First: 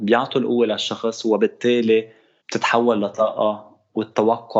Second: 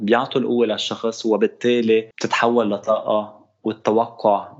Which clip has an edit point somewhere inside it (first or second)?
second